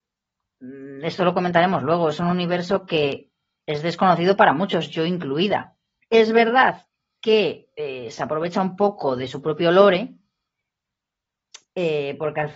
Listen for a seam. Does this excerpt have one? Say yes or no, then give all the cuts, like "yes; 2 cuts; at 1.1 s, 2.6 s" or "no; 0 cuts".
yes; 1 cut; at 6.0 s